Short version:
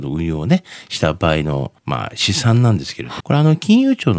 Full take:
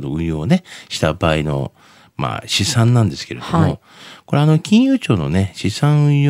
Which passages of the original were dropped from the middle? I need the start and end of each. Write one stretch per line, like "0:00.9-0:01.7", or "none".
0:01.8-0:02.1
0:03.5-0:04.2